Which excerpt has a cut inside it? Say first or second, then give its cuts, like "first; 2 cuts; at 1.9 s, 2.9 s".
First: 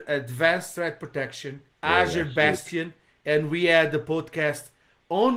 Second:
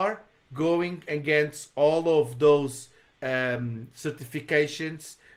first; 1 cut; at 1.7 s